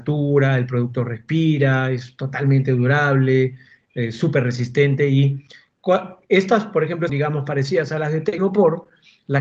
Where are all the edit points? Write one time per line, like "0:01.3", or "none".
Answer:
0:07.1